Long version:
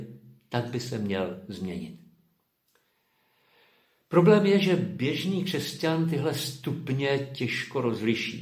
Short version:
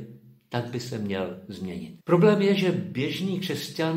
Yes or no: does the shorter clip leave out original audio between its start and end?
yes